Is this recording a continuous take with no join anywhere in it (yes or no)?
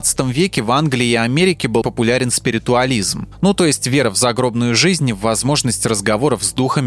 no